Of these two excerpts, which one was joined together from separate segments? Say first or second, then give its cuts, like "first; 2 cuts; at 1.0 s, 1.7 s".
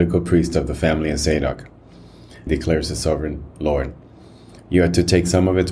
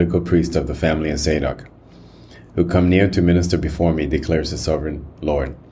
first; 1 cut; at 2.5 s